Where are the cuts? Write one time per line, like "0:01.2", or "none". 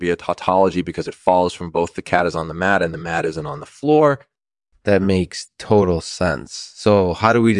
none